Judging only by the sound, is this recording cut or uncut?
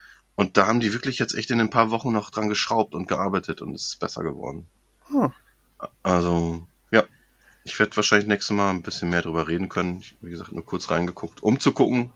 uncut